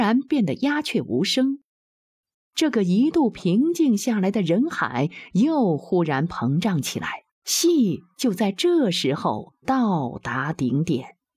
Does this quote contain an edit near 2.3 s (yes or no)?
yes